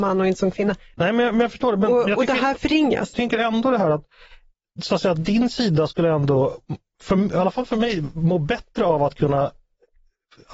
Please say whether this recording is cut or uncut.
cut